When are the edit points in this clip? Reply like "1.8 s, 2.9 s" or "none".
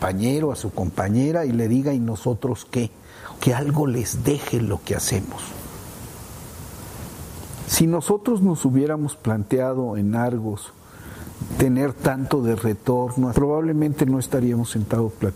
3.4 s, 7.6 s, 13.3 s